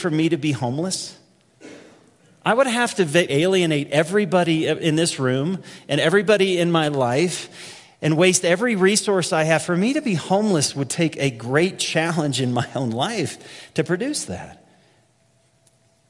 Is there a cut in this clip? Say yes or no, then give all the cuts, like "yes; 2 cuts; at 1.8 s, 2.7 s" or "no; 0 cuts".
yes; 1 cut; at 3.3 s